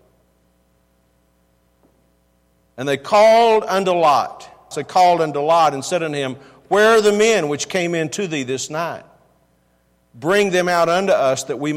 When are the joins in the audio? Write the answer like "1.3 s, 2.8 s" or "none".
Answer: 4.7 s